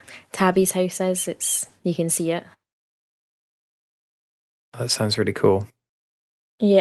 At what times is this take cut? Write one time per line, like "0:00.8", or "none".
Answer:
none